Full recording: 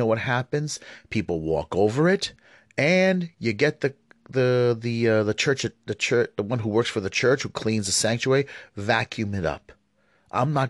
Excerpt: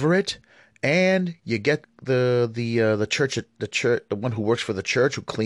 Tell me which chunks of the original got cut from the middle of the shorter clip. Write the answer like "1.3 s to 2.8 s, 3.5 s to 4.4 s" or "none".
3.8 s to 4.1 s